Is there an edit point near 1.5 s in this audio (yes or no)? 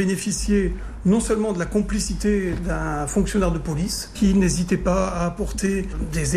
no